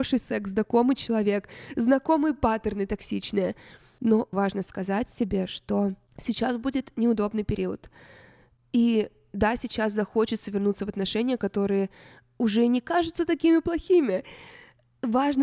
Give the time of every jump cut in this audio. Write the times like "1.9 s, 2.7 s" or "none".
4.3 s